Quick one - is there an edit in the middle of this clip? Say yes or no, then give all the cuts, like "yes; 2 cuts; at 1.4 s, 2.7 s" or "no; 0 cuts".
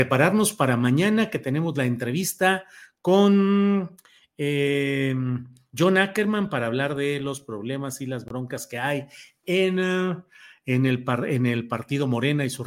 no; 0 cuts